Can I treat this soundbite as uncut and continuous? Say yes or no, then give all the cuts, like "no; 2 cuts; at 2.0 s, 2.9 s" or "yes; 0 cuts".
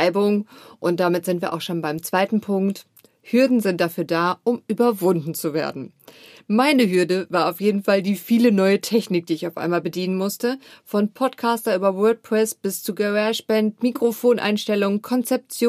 yes; 0 cuts